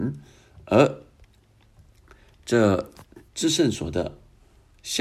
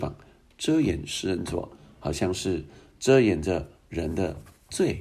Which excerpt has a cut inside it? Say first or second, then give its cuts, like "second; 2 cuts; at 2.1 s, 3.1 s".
first; 1 cut; at 3.3 s